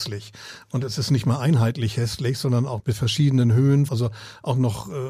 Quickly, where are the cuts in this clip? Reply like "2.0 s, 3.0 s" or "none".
2.8 s, 3.9 s